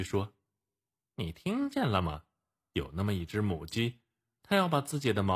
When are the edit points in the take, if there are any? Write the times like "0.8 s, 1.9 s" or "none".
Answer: none